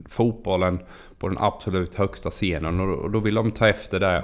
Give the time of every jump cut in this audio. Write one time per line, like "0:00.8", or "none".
none